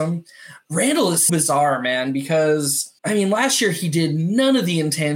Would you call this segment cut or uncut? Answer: cut